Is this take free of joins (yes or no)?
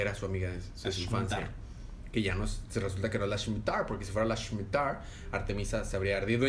yes